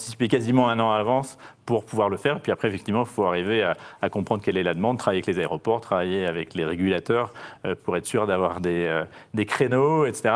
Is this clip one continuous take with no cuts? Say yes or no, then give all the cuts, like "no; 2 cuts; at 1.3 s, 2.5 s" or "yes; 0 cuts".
yes; 0 cuts